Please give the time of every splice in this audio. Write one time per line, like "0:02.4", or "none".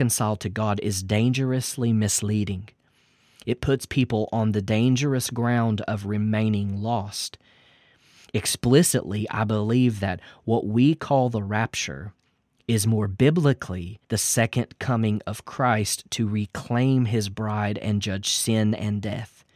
0:14.0